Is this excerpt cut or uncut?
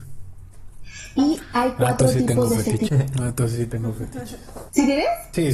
cut